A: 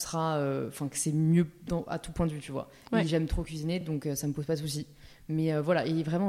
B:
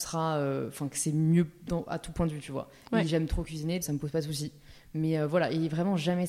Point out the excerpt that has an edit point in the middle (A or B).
B